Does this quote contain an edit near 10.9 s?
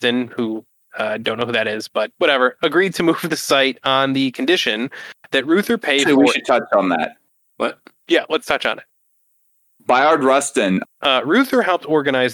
yes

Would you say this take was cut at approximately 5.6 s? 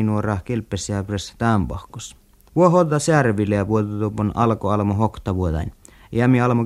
no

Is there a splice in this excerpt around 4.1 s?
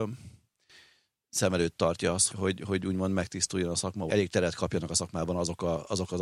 yes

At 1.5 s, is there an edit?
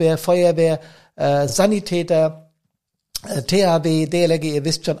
no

